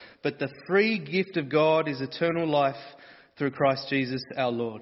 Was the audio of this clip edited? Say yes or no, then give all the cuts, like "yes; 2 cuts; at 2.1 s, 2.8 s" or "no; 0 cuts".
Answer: no; 0 cuts